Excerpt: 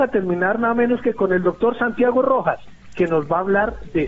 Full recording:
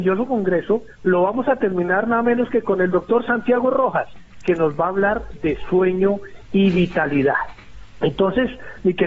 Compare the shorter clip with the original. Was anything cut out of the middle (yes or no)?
no